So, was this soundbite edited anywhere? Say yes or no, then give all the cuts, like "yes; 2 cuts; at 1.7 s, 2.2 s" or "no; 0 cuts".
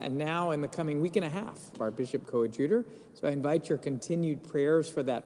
yes; 1 cut; at 1.7 s